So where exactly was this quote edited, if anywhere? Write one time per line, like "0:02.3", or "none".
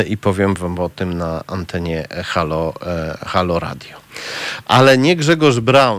none